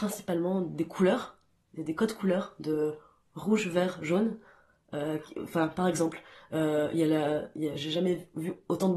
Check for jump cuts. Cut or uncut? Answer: uncut